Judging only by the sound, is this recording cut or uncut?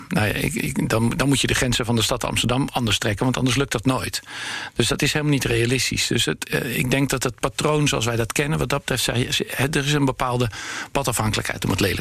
uncut